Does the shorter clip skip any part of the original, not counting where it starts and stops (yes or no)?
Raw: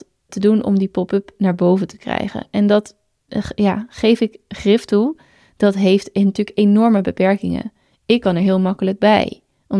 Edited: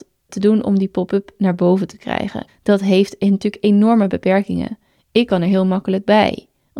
yes